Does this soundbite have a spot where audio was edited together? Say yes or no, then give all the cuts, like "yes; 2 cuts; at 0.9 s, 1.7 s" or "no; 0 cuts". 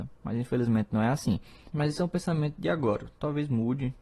yes; 1 cut; at 1.7 s